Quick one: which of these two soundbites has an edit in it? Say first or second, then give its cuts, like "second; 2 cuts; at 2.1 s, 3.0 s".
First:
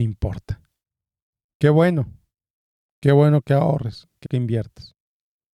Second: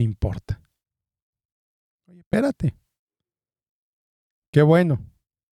first; 2 cuts; at 1.4 s, 4.3 s